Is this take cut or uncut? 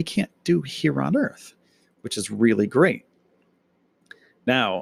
uncut